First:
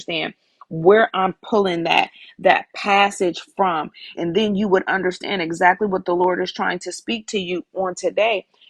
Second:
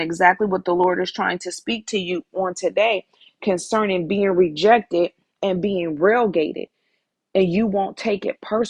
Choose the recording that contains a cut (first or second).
first